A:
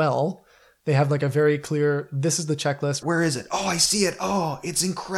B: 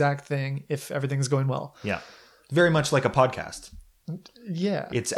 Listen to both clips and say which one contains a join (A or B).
A